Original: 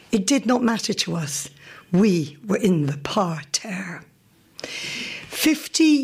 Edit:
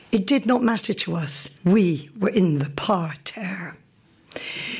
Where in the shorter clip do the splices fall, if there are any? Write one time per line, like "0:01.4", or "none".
0:01.6